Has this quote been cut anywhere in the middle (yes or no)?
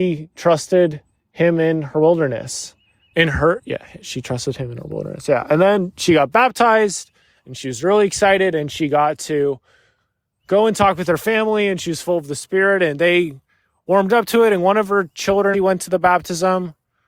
yes